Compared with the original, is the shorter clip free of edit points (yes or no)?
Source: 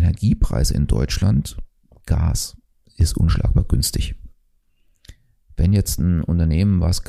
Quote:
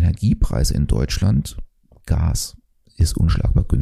yes